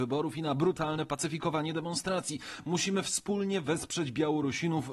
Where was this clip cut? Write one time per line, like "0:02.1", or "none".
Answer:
none